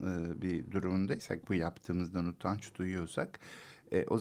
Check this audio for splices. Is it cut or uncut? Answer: uncut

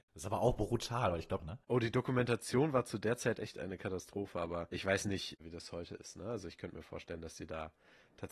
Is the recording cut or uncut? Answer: cut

